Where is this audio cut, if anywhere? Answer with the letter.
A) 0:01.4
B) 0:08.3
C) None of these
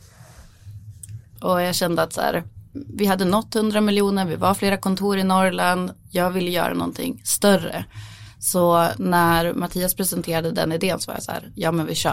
A